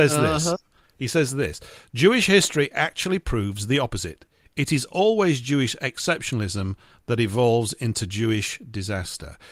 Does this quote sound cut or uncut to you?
uncut